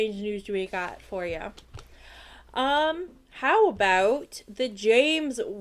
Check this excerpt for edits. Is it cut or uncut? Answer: uncut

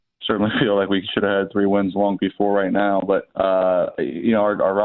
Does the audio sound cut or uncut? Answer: cut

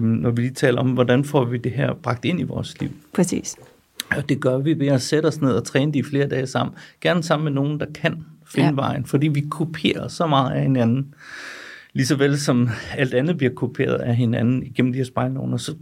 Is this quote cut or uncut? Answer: uncut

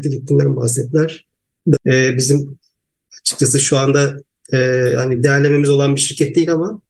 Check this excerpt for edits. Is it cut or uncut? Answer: cut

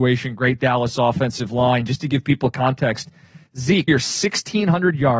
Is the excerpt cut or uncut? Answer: cut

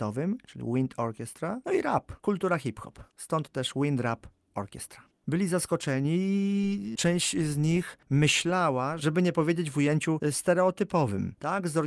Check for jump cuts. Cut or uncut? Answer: cut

